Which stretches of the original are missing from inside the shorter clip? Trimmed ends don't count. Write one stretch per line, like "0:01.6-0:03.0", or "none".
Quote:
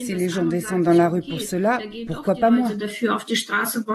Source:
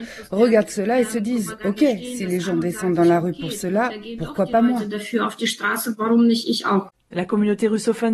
none